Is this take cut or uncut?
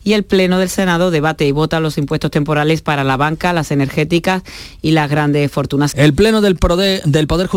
cut